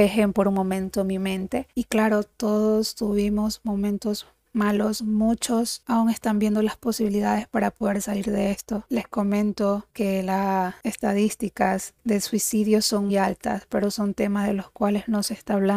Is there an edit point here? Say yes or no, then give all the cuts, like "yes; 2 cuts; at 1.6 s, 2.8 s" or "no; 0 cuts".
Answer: yes; 2 cuts; at 5.0 s, 13.1 s